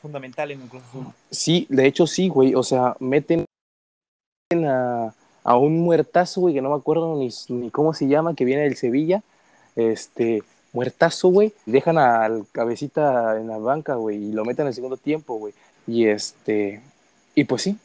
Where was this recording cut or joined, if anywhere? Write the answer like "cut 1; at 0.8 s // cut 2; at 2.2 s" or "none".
cut 1; at 11.7 s // cut 2; at 15.7 s